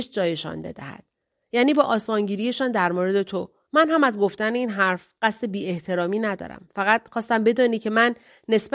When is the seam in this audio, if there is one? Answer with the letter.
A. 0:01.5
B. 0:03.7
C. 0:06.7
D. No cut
B